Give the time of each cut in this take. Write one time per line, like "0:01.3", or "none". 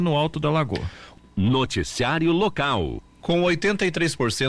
0:03.2

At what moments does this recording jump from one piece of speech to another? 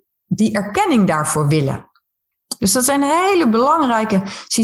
0:02.6

